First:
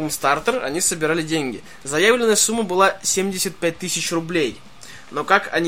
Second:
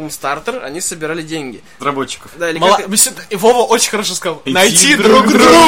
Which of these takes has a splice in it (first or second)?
second